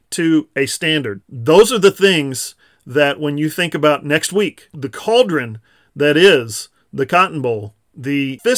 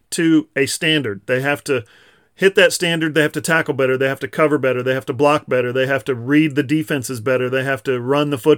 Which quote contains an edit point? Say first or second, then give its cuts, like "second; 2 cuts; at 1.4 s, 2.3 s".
first; 1 cut; at 1.2 s